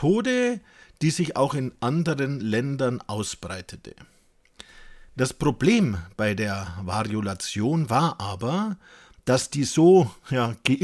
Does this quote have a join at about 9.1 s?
no; 0 cuts

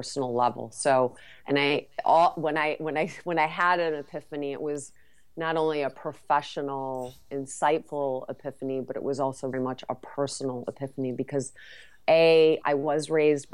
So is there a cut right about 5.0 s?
no; 2 cuts; at 9.5 s, 12.6 s

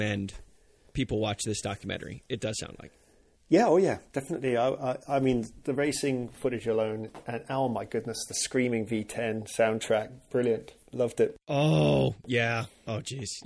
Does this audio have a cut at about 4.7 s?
no; 0 cuts

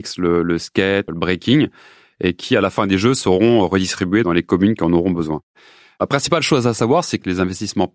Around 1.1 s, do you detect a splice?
yes; 1 cut; at 1.1 s

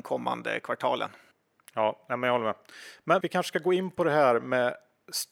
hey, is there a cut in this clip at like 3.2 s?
yes; 1 cut; at 3.2 s

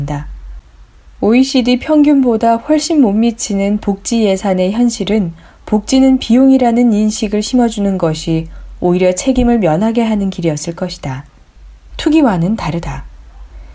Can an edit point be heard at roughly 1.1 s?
no; 1 cut; at 11.9 s

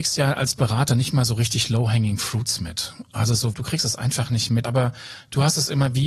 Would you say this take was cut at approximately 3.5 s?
yes; 2 cuts; at 3.5 s, 4.6 s

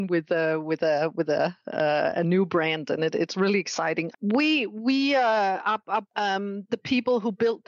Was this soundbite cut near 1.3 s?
no; 2 cuts; at 4.1 s, 6.0 s

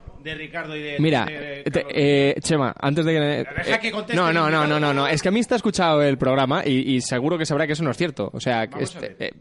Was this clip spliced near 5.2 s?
yes; 1 cut; at 5.2 s

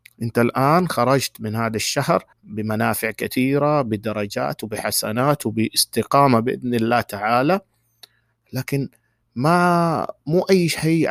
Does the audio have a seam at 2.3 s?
yes; 1 cut; at 2.3 s

